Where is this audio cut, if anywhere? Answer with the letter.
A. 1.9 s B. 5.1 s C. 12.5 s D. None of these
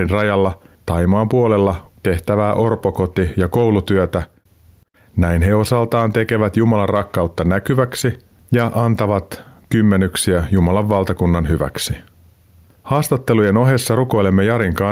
A